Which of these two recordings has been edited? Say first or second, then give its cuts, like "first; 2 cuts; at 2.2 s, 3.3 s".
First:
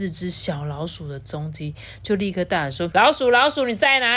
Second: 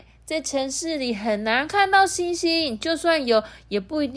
first; 1 cut; at 2.9 s